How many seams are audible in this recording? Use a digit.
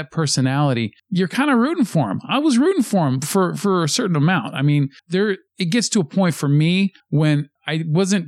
0